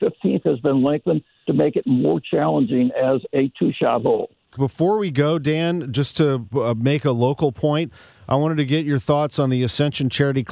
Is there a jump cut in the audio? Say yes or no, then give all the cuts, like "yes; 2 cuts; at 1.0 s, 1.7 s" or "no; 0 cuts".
yes; 1 cut; at 4.6 s